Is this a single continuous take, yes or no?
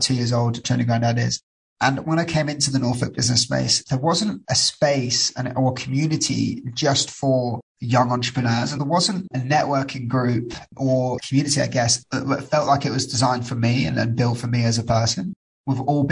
yes